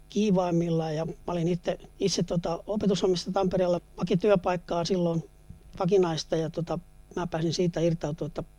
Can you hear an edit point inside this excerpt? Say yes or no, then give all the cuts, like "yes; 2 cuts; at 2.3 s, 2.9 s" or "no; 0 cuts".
yes; 2 cuts; at 1.9 s, 3.8 s